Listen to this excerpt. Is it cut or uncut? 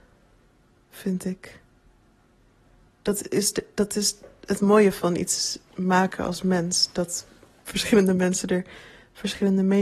uncut